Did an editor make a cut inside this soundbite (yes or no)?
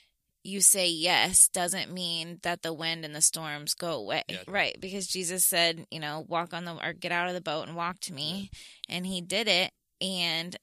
yes